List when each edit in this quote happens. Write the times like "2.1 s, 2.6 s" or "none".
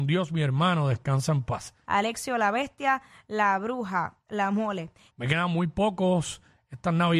1.9 s, 5.1 s